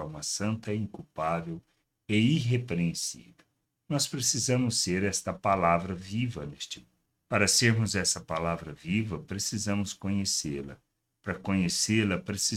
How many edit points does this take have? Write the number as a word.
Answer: zero